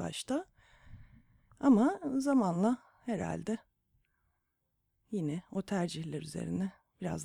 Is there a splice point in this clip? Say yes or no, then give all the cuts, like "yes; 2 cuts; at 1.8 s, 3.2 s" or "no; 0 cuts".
no; 0 cuts